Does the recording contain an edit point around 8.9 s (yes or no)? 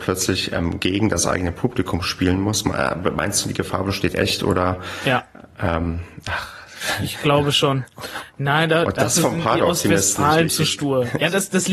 no